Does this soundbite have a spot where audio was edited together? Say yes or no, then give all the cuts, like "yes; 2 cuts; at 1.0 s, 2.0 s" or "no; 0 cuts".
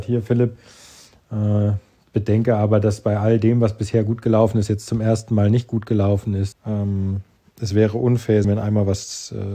yes; 2 cuts; at 6.5 s, 8.4 s